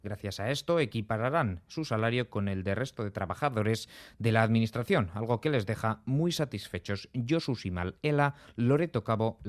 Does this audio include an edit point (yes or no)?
no